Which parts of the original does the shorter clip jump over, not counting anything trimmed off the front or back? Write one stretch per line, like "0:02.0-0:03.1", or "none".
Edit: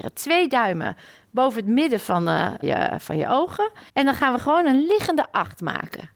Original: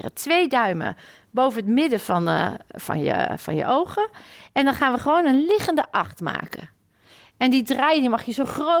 0:02.6-0:03.0
0:04.3-0:04.5